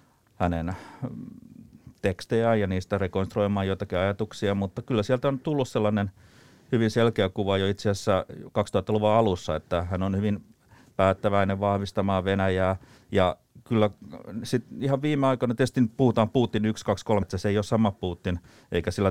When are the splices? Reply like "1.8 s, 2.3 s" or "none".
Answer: 13.0 s, 17.2 s